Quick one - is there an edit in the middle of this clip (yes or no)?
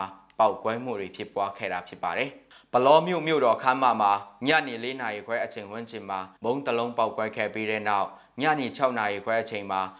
yes